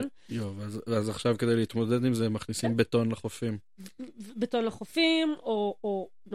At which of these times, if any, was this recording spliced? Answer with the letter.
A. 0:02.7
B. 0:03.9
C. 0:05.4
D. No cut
D